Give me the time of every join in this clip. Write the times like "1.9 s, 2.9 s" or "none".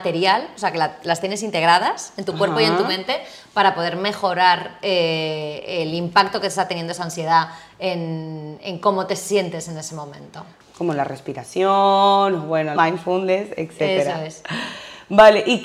10.6 s, 12.8 s